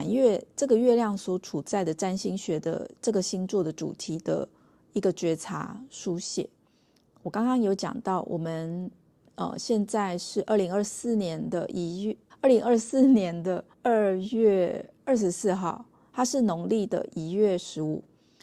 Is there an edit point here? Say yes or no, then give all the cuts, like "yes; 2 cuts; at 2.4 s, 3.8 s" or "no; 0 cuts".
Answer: yes; 2 cuts; at 12.3 s, 13.7 s